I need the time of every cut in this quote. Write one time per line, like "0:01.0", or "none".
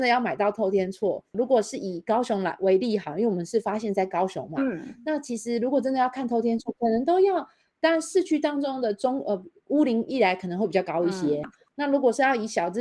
0:01.3
0:11.4